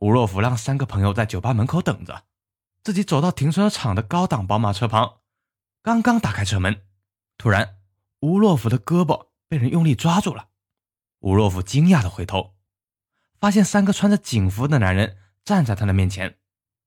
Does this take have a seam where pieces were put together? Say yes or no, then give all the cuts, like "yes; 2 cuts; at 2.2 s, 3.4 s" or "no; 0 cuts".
no; 0 cuts